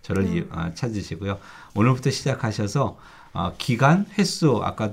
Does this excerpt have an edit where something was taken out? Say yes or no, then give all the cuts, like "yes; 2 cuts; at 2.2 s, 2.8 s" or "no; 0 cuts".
no; 0 cuts